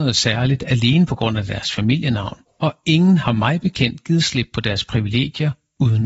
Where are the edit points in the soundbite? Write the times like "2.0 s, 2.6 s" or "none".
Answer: 2.5 s